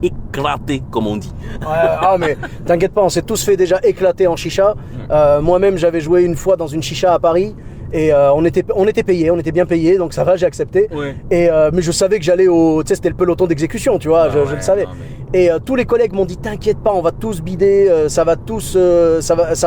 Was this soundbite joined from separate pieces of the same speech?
yes; 1 cut; at 15.3 s

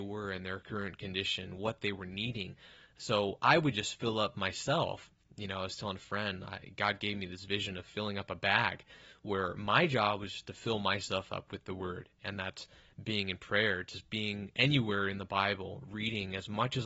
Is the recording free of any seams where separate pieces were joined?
yes; 0 cuts

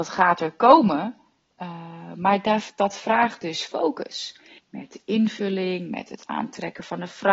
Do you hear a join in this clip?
yes; 1 cut; at 4.6 s

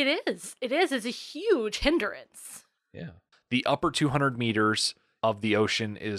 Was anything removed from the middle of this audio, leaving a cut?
yes; 1 cut; at 3.3 s

